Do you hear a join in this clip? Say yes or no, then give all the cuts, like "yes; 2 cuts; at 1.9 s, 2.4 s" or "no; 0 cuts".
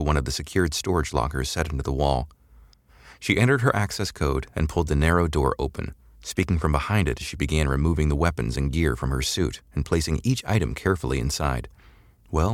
no; 0 cuts